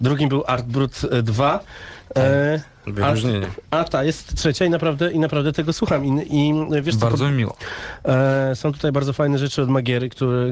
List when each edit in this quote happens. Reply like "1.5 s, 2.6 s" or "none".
none